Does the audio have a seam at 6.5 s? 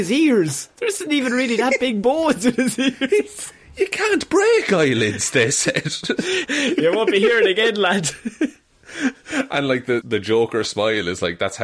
yes; 2 cuts; at 6.5 s, 10.0 s

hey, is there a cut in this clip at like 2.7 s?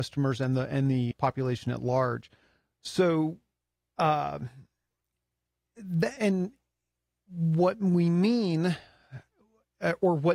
no; 2 cuts; at 1.1 s, 6.2 s

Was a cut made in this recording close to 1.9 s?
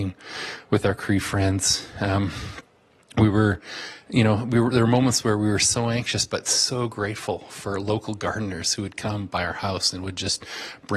no; 0 cuts

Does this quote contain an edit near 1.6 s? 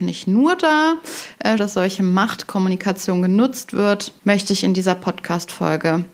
yes; 2 cuts; at 1.6 s, 4.2 s

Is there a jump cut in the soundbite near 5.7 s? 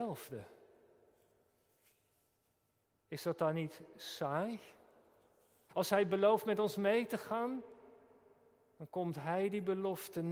yes; 1 cut; at 5.7 s

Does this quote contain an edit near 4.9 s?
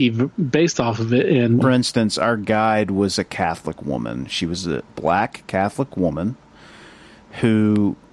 yes; 2 cuts; at 1.6 s, 4.9 s

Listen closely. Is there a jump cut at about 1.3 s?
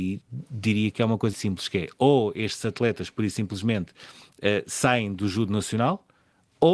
yes; 1 cut; at 1.3 s

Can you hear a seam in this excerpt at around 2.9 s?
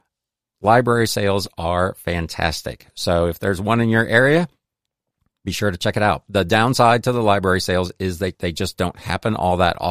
no; 1 cut; at 8.3 s

